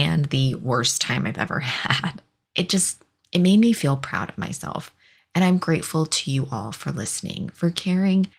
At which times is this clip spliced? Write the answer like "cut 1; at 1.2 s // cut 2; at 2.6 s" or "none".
cut 1; at 2.4 s